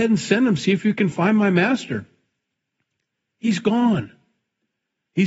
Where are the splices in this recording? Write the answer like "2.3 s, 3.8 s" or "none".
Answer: none